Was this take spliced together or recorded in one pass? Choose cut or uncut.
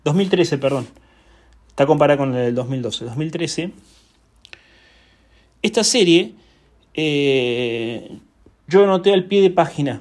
uncut